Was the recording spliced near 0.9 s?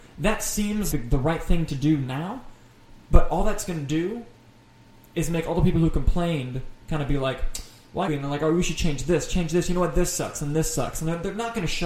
yes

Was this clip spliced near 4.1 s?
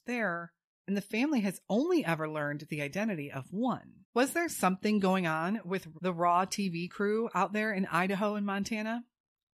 yes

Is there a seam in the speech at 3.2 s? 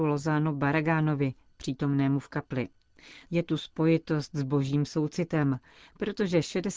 yes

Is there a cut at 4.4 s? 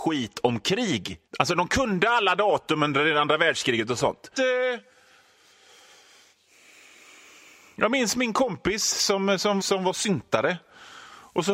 yes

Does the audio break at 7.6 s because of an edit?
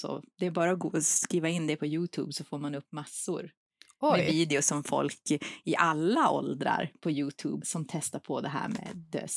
yes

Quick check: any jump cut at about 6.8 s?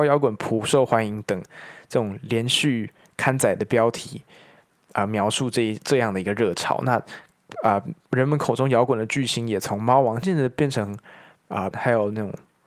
no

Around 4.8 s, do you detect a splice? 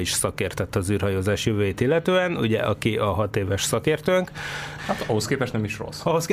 yes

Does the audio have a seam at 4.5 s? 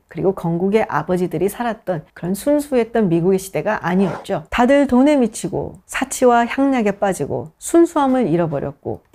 yes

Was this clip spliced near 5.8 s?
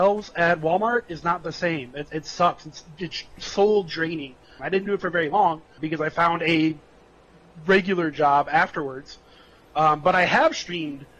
yes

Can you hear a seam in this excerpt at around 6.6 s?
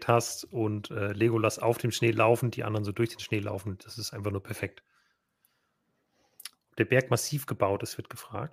yes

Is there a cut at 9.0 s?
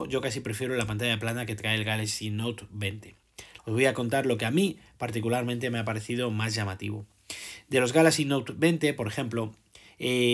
no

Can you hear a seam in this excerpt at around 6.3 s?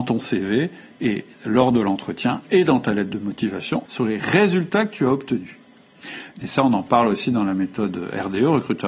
yes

